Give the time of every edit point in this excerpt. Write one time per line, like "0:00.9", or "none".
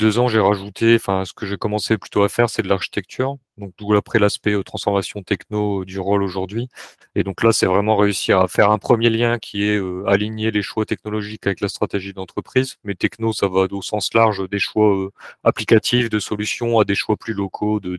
none